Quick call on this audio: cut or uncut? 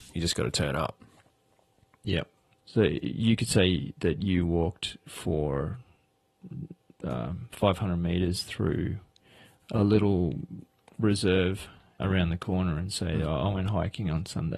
cut